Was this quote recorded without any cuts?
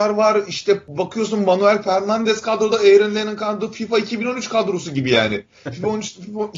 yes; 0 cuts

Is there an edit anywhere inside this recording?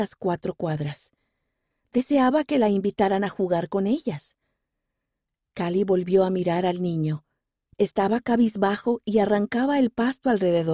no; 0 cuts

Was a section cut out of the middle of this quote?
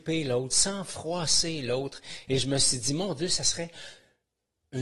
no; 0 cuts

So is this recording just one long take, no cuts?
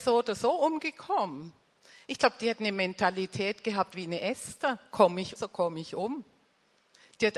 no; 1 cut; at 5.4 s

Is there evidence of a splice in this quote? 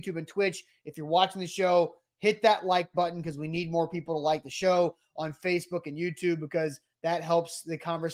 no; 0 cuts

